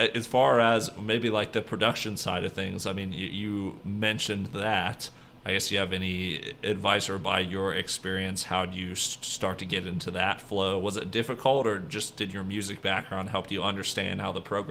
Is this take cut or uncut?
uncut